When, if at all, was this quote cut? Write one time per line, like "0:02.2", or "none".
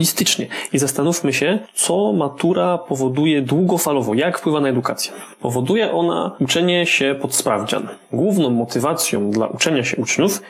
none